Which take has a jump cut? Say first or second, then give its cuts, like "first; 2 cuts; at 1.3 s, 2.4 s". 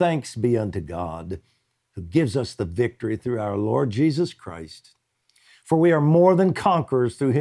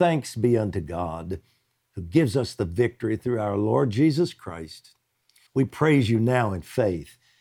second; 1 cut; at 5.5 s